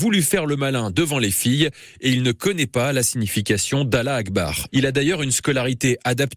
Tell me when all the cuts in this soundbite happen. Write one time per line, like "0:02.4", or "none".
0:04.7